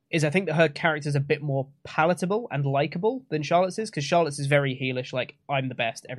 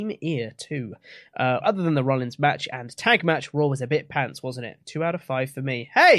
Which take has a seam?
second; 1 cut; at 1.6 s

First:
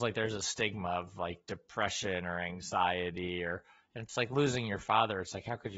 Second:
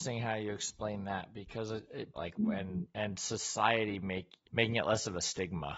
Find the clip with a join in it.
second; 2 cuts; at 2.1 s, 4.5 s

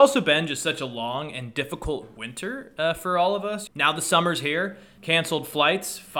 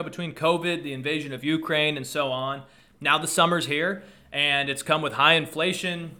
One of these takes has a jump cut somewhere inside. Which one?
first; 2 cuts; at 3.7 s, 5.0 s

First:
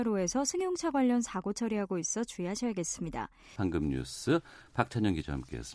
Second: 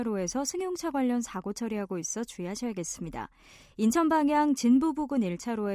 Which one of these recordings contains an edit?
first; 1 cut; at 3.6 s

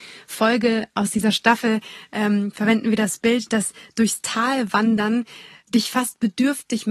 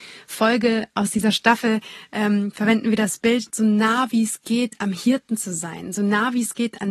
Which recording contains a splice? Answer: second; 1 cut; at 3.5 s

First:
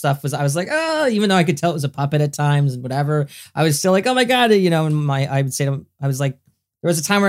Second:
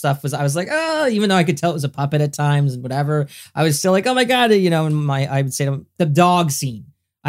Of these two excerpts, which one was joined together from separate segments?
second; 1 cut; at 6.0 s

